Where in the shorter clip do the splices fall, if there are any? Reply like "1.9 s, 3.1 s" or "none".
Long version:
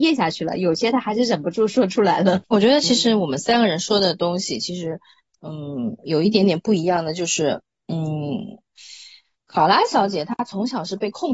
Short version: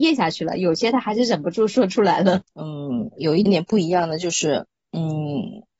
2.4 s, 3.5 s